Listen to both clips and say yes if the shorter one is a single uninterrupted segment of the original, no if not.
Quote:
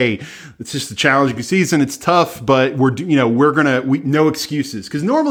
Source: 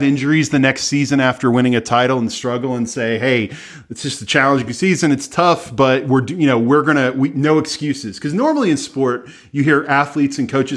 yes